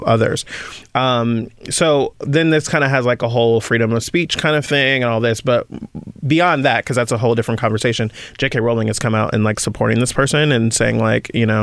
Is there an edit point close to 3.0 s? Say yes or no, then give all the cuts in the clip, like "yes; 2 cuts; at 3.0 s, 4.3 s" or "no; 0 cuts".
no; 0 cuts